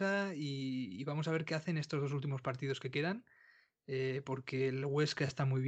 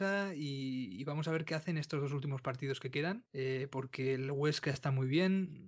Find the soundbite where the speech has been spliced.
second; 1 cut; at 3.3 s

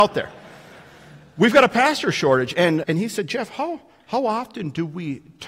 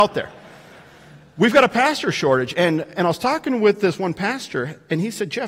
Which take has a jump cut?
first; 1 cut; at 2.8 s

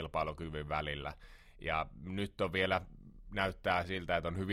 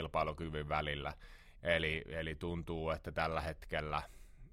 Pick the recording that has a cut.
second; 1 cut; at 1.6 s

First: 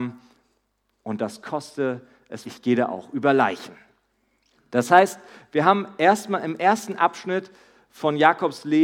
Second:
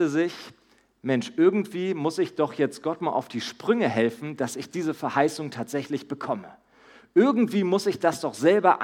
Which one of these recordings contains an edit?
first; 2 cuts; at 2.4 s, 4.6 s

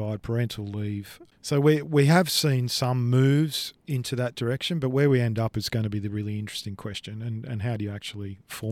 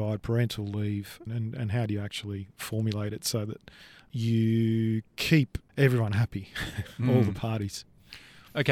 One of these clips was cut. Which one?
second; 1 cut; at 1.3 s

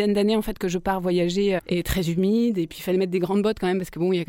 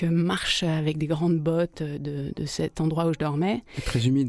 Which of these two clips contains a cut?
first; 1 cut; at 1.6 s

